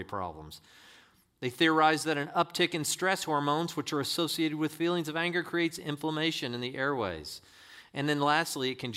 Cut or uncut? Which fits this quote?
uncut